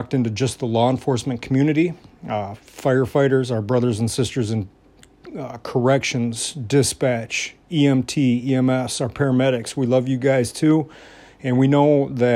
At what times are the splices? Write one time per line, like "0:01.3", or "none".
none